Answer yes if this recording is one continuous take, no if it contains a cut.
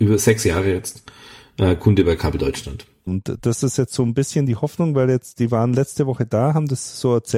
no